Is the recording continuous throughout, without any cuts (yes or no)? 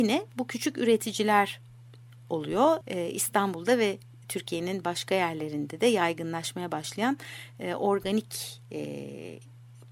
no